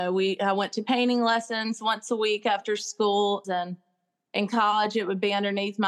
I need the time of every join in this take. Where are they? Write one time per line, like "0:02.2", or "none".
0:03.4